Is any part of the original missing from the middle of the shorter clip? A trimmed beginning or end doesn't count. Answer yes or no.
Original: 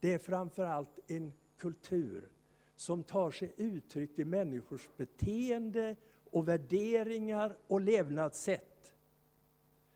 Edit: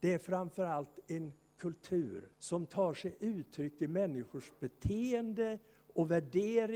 yes